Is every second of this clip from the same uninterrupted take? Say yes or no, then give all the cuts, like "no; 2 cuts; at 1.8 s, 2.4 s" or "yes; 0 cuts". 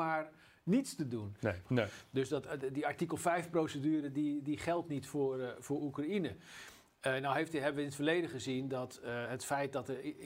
no; 1 cut; at 1.6 s